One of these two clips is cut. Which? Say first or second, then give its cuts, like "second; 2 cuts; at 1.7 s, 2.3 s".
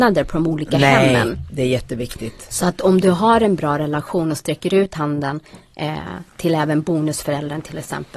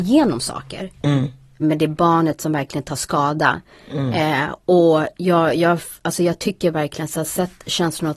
second; 1 cut; at 1.6 s